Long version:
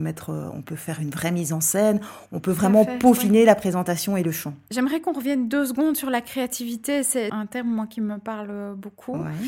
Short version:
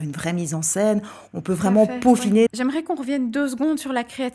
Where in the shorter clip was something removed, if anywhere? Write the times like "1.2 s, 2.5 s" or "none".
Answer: 2.5 s